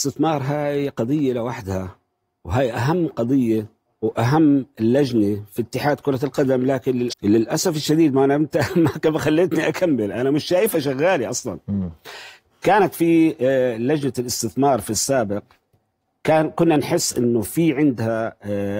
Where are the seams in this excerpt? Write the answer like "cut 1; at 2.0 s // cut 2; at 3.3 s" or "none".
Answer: cut 1; at 7.1 s